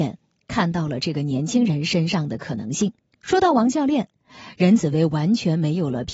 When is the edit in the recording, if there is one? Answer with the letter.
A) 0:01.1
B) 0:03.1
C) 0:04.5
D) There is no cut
B